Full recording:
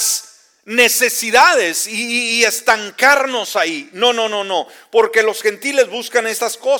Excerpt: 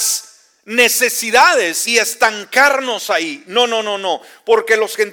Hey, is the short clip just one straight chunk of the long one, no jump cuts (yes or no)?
no